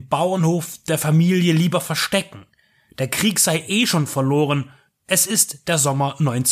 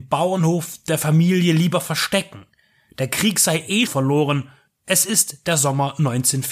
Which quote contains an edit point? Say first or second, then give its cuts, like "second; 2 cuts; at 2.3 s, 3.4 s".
second; 1 cut; at 3.9 s